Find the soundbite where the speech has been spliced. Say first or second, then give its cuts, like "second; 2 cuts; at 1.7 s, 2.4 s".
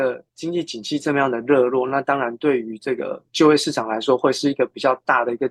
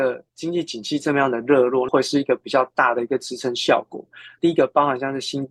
second; 2 cuts; at 1.9 s, 4.4 s